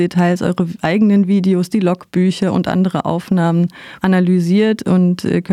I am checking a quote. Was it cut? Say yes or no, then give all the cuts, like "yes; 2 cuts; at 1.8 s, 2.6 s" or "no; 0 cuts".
yes; 1 cut; at 4.0 s